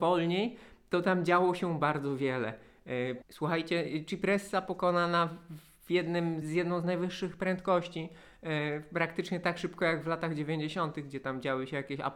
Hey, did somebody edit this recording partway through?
yes; 2 cuts; at 3.2 s, 6.4 s

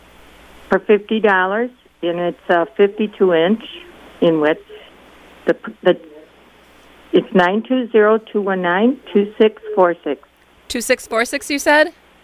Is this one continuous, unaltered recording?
yes; 0 cuts

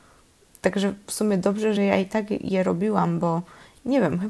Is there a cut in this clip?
no; 0 cuts

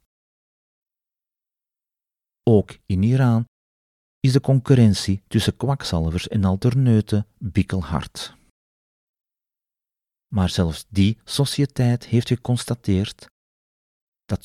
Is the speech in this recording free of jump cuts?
no; 1 cut; at 10.2 s

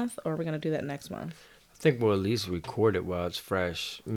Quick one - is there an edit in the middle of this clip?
no; 0 cuts

